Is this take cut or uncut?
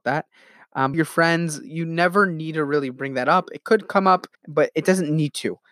cut